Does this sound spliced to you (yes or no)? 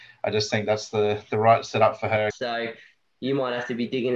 yes